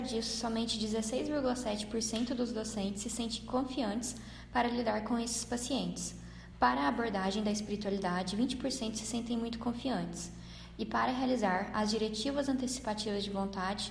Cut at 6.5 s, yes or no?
yes